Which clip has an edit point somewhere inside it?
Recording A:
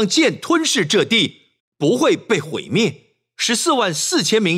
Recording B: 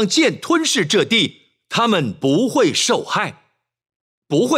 A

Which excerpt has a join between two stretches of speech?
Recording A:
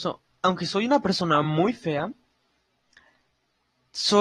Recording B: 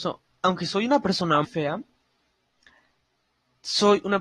B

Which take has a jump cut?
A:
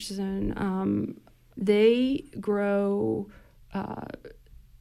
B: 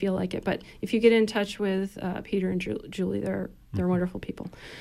A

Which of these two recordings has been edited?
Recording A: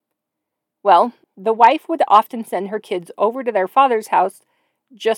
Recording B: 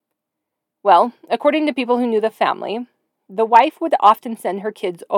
A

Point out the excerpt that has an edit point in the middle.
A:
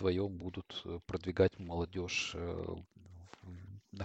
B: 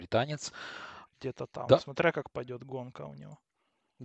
B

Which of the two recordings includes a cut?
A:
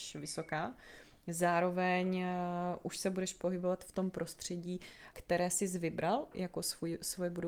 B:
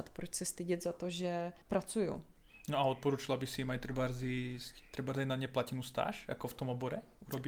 B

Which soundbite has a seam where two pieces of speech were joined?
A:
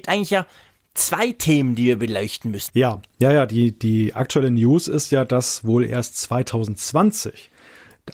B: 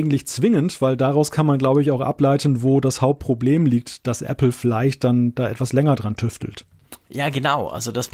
A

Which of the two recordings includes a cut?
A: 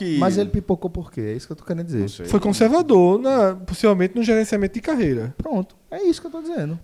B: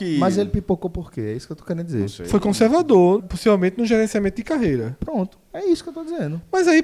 B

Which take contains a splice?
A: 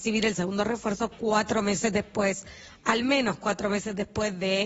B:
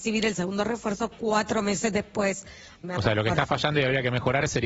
B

